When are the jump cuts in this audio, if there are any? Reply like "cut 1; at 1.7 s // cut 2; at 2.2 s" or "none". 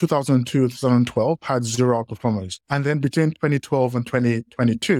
cut 1; at 2.6 s